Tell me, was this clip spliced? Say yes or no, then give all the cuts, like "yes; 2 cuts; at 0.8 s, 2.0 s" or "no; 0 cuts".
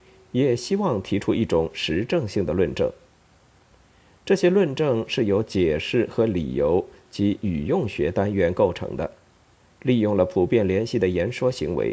no; 0 cuts